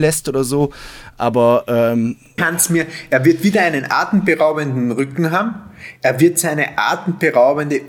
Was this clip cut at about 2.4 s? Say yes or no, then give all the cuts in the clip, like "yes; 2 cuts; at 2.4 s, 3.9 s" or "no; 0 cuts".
yes; 1 cut; at 2.4 s